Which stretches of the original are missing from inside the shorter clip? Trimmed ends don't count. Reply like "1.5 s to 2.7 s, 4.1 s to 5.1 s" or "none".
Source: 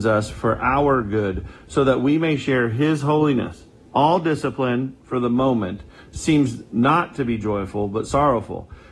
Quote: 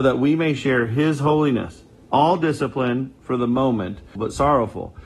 6.0 s to 7.9 s